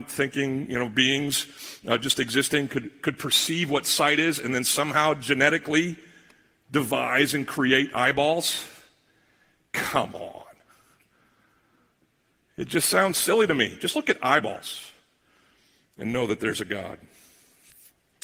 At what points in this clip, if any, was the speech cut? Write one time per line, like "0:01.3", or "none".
none